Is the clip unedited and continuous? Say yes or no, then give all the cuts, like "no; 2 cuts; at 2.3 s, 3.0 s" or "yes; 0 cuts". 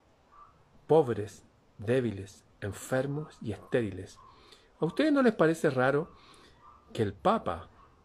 yes; 0 cuts